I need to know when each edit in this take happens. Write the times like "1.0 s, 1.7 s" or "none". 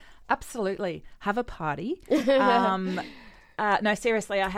none